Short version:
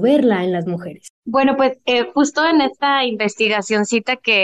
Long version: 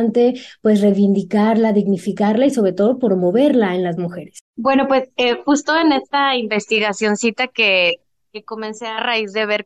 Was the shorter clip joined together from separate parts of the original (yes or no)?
no